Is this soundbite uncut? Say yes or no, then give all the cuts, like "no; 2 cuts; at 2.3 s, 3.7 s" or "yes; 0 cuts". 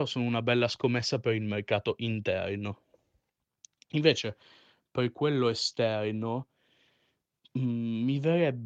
yes; 0 cuts